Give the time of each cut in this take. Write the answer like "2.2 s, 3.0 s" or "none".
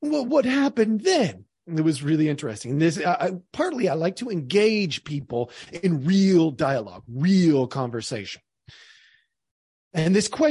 1.5 s